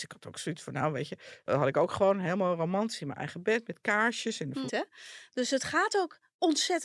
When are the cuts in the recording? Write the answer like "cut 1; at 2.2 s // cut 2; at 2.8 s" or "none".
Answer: cut 1; at 4.7 s